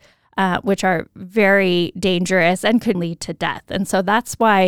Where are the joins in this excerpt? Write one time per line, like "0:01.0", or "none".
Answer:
0:02.9